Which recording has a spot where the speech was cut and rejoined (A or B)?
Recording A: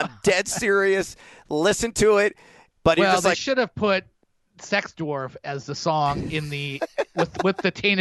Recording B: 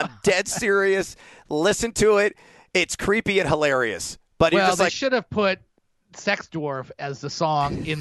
A